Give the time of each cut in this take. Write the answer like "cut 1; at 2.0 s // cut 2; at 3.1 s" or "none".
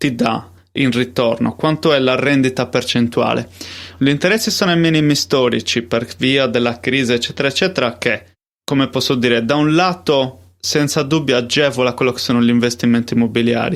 cut 1; at 4.0 s